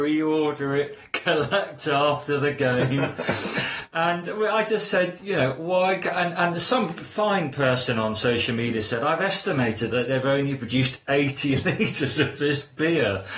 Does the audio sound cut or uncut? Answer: uncut